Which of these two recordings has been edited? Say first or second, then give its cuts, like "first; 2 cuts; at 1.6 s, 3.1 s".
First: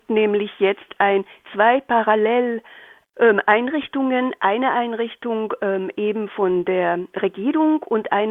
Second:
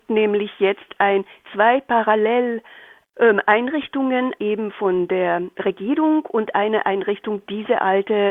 second; 1 cut; at 4.4 s